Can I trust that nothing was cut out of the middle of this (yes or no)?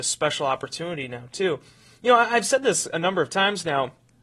yes